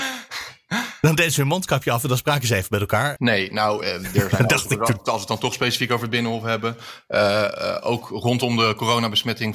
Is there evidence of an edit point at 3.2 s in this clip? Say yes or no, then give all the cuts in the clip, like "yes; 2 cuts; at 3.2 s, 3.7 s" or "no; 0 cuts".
yes; 1 cut; at 3.2 s